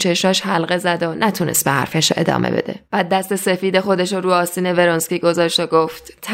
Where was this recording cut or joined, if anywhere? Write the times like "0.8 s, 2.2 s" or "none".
2.9 s